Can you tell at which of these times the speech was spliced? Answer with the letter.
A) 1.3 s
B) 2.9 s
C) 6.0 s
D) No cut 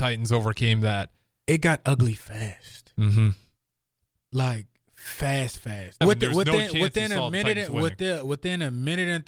C